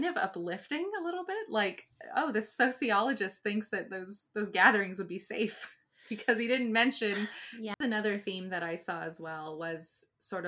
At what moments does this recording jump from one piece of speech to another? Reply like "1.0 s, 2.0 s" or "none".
7.7 s